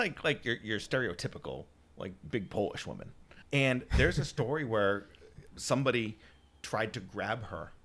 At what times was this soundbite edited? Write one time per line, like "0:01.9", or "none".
0:03.4
0:05.5